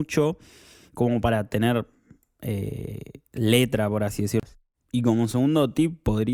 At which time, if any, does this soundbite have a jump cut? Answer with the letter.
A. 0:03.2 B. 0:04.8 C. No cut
C